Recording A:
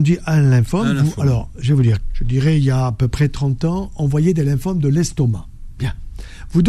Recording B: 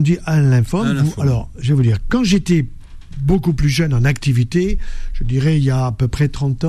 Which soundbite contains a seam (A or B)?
A